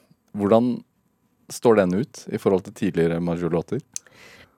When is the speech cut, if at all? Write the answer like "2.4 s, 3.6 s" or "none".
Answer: none